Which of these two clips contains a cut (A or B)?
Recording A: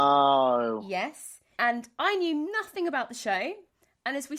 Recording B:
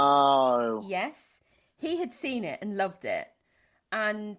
A